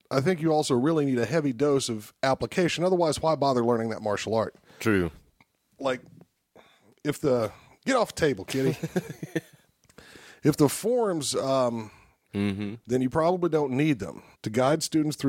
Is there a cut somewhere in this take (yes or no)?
yes